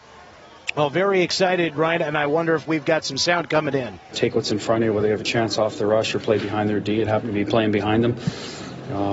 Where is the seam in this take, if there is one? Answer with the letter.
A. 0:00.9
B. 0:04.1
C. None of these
B